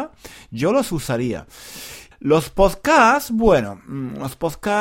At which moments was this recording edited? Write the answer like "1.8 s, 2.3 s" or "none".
2.1 s

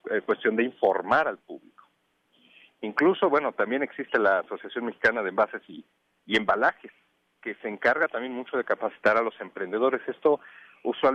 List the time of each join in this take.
none

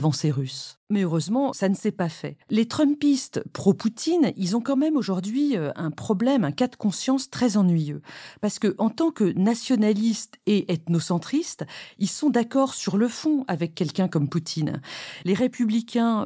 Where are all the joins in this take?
2.4 s, 15.2 s

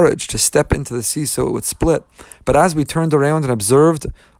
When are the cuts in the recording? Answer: none

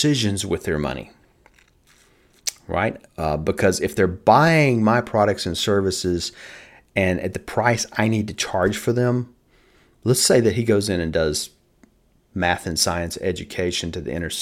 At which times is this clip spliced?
3.1 s

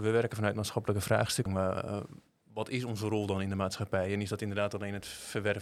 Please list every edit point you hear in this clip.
1.5 s

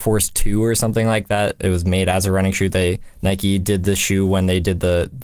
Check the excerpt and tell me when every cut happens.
1.6 s

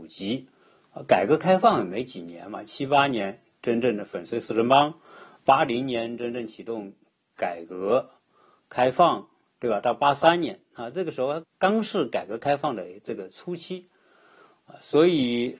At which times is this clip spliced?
11.4 s

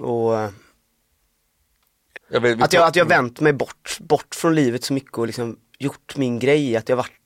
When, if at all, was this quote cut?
2.2 s

